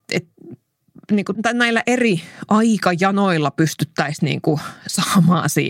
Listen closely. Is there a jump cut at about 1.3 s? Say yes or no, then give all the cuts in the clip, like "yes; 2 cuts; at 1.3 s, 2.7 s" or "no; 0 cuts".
yes; 1 cut; at 1.3 s